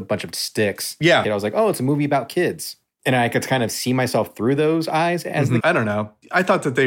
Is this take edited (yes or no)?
yes